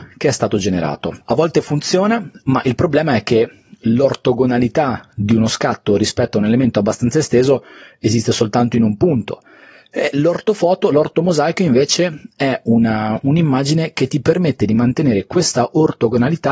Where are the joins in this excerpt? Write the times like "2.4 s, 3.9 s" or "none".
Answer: 1.2 s